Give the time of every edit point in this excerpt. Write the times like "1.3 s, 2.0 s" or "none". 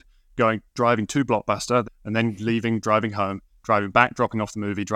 1.8 s